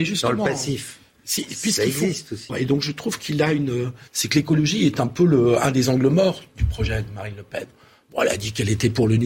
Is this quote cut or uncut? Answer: cut